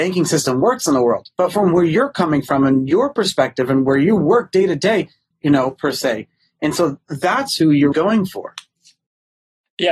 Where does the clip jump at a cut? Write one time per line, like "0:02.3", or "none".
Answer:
0:05.3
0:07.9